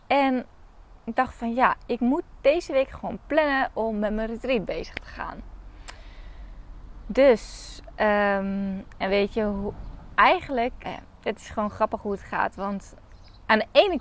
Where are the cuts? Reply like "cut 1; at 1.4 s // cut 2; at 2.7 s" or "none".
cut 1; at 10.8 s